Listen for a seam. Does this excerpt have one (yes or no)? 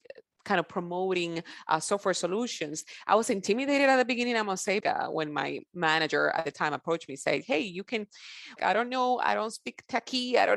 yes